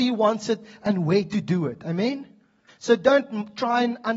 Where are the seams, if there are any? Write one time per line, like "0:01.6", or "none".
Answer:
0:02.7